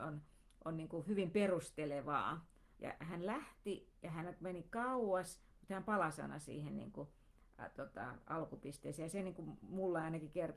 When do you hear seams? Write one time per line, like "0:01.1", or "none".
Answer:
0:02.7